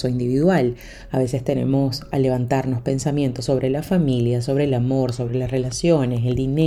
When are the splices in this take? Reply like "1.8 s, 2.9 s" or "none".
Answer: 1.1 s